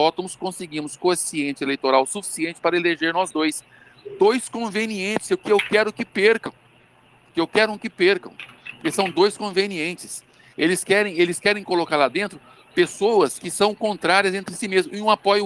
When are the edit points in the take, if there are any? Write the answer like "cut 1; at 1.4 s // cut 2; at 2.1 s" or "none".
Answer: none